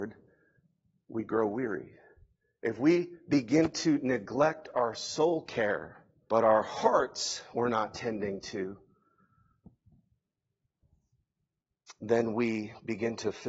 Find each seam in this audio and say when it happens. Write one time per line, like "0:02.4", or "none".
0:06.3